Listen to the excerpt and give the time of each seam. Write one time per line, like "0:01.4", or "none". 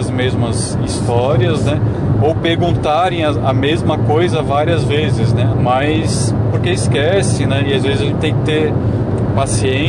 0:05.5